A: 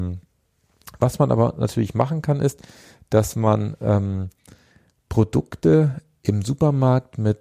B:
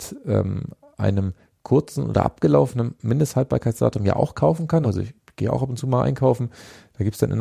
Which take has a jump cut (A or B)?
B